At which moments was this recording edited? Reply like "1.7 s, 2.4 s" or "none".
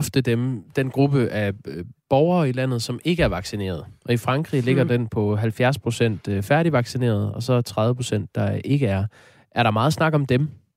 none